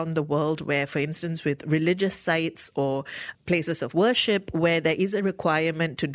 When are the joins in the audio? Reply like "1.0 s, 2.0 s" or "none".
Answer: 3.3 s